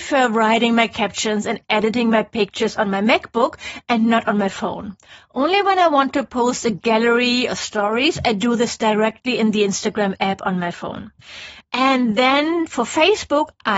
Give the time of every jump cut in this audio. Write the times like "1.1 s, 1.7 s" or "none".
none